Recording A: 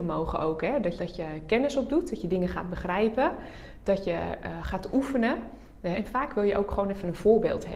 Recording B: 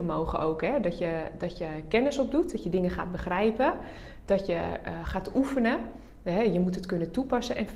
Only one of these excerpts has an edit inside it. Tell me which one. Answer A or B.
A